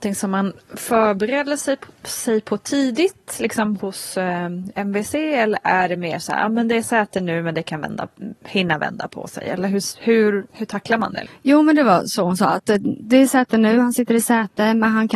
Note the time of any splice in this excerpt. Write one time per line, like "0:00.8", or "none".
0:03.8
0:11.3